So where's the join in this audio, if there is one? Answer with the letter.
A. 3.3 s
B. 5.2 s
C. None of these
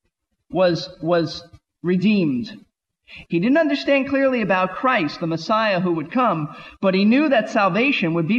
A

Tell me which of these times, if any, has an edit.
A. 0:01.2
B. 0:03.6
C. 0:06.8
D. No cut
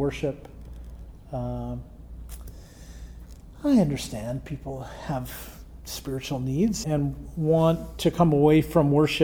C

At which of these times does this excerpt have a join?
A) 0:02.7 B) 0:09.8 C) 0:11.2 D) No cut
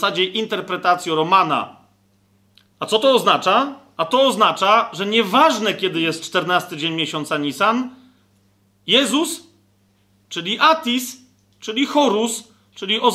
A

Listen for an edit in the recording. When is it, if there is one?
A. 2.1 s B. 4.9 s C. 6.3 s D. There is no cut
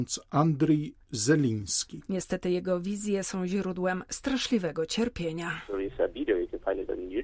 A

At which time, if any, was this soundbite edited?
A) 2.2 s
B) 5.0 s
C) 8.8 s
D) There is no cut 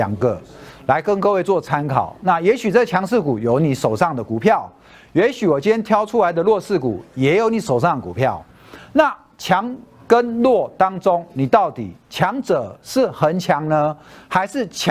D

